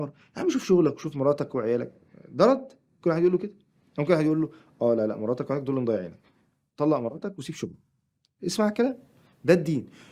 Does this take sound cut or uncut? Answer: uncut